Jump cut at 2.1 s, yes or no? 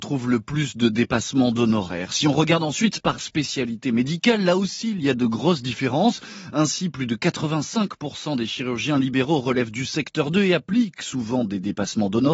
no